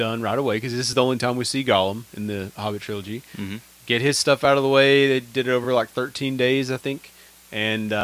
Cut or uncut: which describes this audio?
uncut